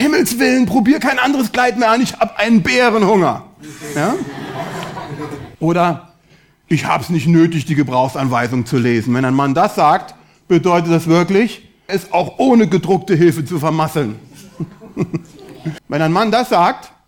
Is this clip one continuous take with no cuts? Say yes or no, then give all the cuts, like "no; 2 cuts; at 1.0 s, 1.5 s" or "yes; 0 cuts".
no; 3 cuts; at 5.6 s, 11.9 s, 15.8 s